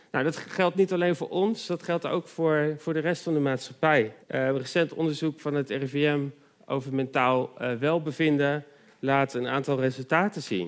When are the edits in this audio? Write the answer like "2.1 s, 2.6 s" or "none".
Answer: 4.2 s